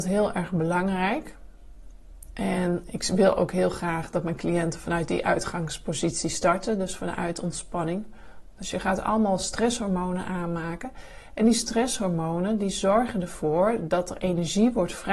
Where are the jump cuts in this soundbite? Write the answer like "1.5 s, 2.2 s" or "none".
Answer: 8.6 s